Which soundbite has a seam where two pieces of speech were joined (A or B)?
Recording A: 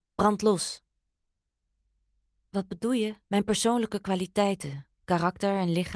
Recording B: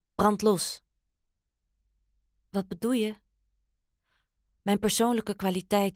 A